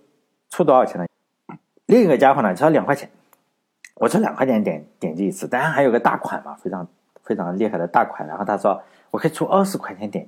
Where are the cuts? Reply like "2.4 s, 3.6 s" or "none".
1.1 s